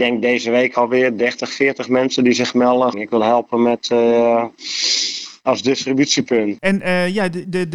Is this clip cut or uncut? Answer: cut